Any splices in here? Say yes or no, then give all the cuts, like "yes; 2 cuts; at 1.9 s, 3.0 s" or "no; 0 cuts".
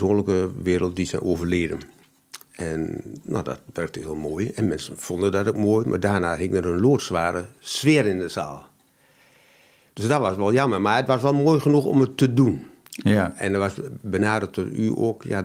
no; 0 cuts